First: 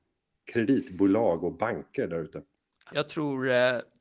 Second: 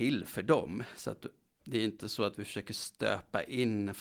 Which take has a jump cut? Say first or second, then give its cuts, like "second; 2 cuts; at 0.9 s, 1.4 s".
first; 1 cut; at 2.9 s